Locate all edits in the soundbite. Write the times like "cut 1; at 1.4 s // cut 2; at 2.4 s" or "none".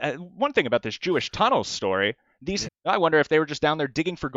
cut 1; at 2.6 s